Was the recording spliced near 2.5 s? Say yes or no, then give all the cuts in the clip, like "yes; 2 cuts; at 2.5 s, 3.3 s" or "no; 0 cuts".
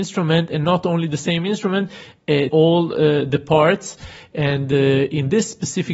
yes; 1 cut; at 2.5 s